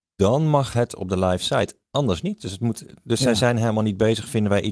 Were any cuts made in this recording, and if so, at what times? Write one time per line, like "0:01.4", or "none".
none